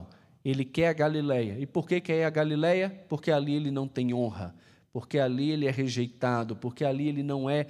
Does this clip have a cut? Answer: no; 0 cuts

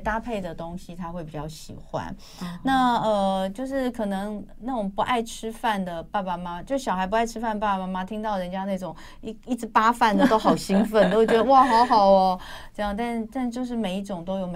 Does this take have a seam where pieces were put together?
no; 0 cuts

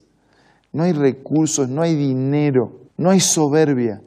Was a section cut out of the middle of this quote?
yes; 1 cut; at 2.9 s

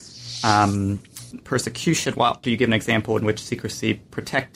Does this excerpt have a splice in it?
yes; 2 cuts; at 1.3 s, 2.4 s

